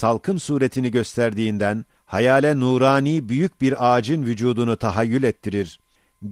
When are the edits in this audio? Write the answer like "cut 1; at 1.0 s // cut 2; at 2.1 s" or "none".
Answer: cut 1; at 2.0 s